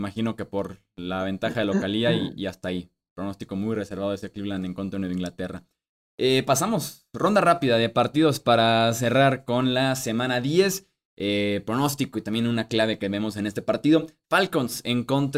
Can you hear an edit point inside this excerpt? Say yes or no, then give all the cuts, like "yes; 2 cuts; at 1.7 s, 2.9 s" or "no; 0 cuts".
no; 0 cuts